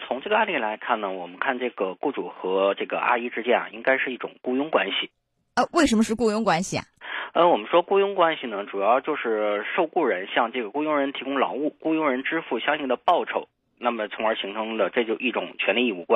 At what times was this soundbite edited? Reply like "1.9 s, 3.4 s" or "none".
none